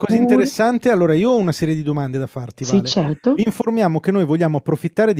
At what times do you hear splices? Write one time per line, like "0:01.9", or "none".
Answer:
none